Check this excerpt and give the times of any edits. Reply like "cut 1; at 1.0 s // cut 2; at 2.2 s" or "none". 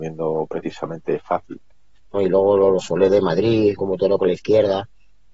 cut 1; at 2.1 s // cut 2; at 3.8 s